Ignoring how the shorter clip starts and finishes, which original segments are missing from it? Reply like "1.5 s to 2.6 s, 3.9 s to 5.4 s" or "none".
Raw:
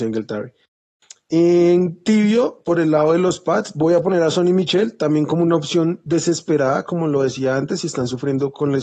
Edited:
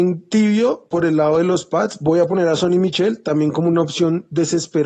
none